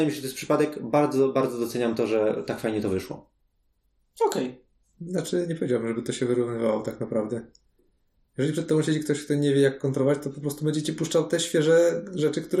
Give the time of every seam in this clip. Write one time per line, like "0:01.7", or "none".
none